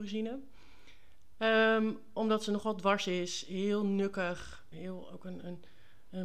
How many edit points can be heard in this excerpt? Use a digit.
1